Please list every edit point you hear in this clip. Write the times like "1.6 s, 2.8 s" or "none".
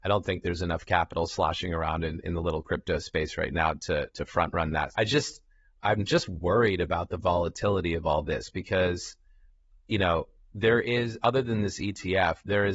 4.9 s